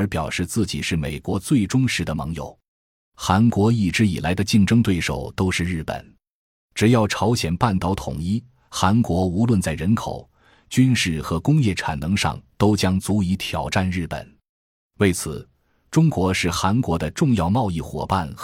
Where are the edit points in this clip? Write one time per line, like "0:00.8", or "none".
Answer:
none